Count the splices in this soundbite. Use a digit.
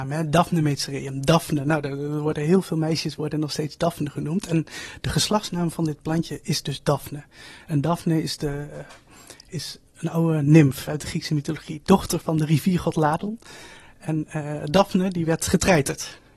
2